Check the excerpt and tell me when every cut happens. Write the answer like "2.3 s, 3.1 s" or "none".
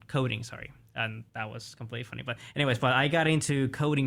1.3 s